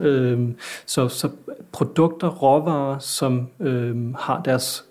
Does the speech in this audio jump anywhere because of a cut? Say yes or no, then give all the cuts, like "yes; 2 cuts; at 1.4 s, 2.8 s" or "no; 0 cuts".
no; 0 cuts